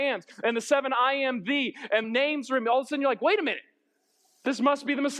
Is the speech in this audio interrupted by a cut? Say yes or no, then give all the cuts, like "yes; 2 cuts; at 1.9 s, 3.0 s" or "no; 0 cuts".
yes; 1 cut; at 2.0 s